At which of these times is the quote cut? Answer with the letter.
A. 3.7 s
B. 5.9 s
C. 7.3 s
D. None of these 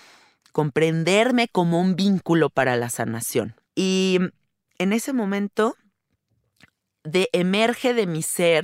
A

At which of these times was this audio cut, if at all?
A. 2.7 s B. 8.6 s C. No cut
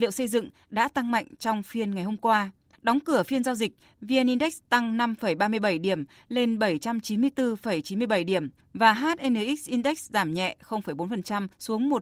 B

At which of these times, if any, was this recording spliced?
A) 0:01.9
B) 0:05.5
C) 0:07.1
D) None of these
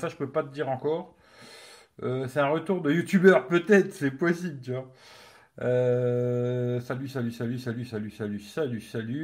D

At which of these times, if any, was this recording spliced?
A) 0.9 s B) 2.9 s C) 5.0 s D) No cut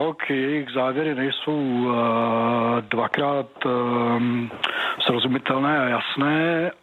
D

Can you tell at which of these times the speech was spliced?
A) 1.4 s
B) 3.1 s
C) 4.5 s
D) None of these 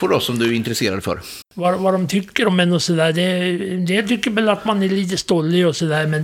A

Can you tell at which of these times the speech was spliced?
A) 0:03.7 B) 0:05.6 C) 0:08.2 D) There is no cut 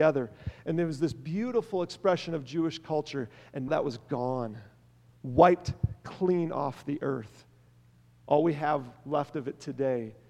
A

